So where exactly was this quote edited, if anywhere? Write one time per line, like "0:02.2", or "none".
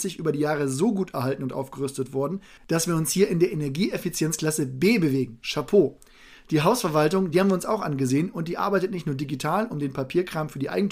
none